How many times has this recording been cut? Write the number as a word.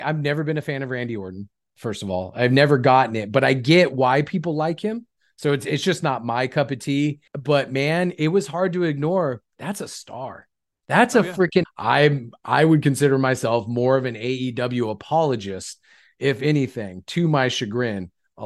two